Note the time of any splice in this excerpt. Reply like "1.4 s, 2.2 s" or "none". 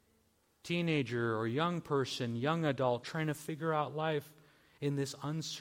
3.0 s